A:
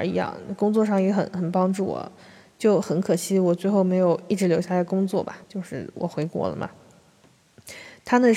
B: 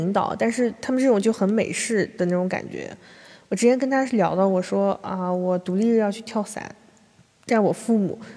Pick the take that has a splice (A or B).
A